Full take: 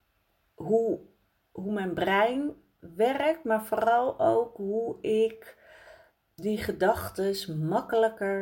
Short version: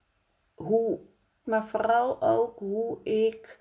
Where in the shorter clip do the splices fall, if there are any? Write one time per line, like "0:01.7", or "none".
0:01.4